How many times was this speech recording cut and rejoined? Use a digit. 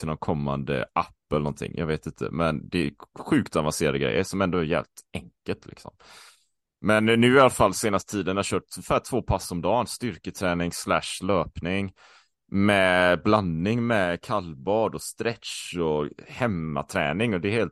0